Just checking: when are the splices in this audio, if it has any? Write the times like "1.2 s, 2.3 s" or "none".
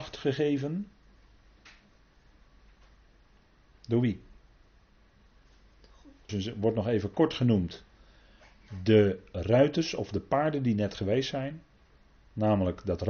6.3 s